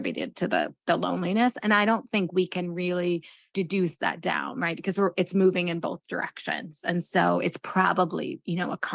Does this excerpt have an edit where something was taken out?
no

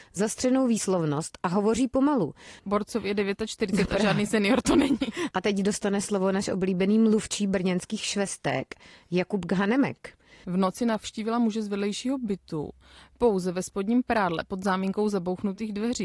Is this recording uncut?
no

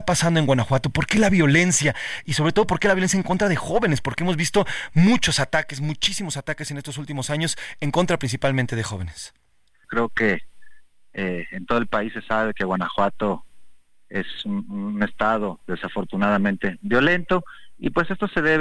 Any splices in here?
yes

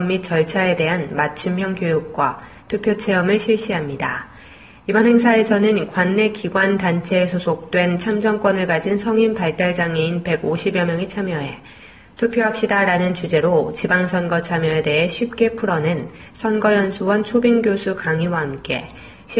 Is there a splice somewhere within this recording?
no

